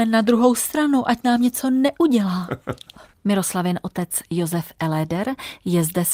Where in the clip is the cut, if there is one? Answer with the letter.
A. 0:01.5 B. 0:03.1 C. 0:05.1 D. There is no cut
B